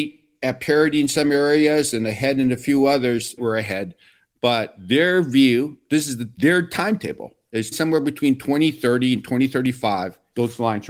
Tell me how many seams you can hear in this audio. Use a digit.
2